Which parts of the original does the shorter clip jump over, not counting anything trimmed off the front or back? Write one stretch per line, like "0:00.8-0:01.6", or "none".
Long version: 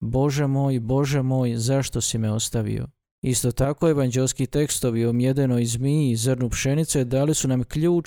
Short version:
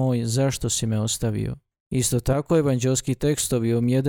none

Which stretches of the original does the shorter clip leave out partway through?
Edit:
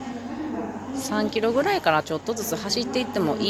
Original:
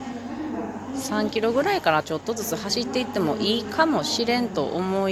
none

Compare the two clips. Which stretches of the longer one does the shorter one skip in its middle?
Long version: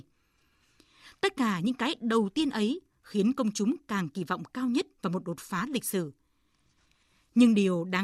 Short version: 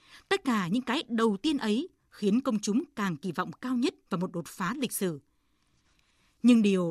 none

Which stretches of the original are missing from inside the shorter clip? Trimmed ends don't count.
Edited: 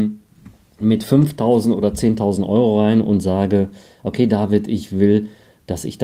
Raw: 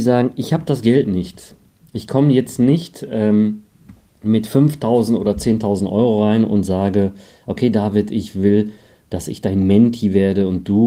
none

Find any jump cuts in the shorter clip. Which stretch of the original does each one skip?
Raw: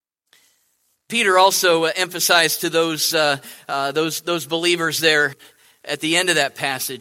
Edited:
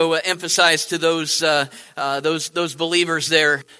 none

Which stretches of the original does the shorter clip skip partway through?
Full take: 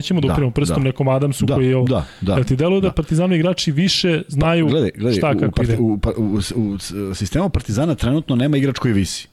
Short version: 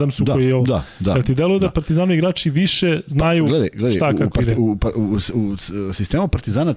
none

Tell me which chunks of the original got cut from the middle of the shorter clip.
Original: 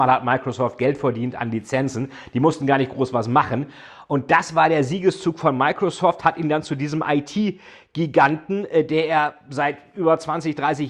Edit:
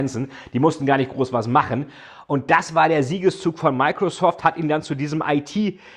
none

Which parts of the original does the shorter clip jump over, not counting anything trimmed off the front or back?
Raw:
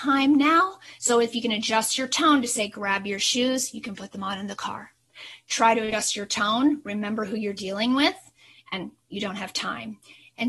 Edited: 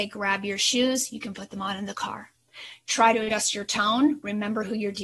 none

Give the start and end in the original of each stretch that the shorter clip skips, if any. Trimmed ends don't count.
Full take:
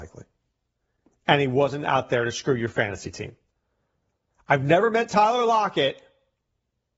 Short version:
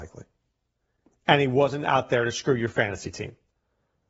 none

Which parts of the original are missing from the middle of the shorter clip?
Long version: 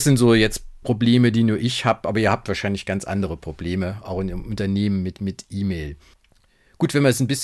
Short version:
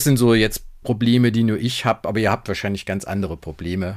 none

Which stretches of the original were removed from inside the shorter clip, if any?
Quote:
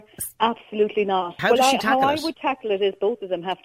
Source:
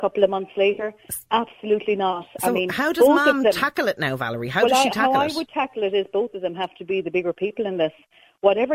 0:02.3-0:04.5

